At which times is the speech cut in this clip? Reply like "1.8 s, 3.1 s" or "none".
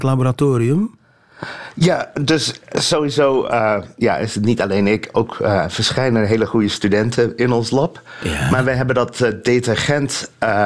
none